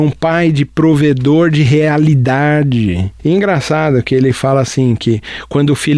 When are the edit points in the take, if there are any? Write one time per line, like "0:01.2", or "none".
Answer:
0:03.2